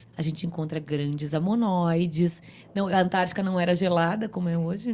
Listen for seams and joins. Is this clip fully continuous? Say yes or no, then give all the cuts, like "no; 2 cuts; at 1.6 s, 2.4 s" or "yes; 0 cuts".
no; 1 cut; at 2.6 s